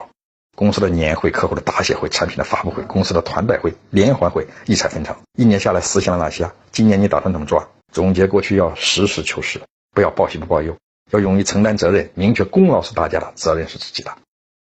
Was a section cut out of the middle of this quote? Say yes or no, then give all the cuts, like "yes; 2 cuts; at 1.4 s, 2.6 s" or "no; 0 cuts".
yes; 2 cuts; at 5.3 s, 7.8 s